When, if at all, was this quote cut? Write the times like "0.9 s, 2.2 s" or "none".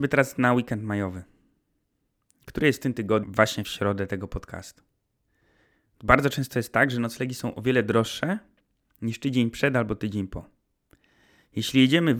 3.2 s